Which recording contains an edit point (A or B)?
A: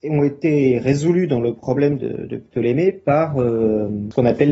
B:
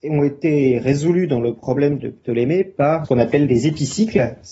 B